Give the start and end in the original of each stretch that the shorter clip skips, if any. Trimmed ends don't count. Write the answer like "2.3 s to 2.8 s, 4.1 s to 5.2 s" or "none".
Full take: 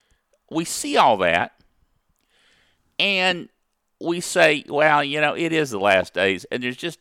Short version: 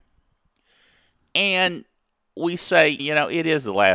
4.6 s to 5.1 s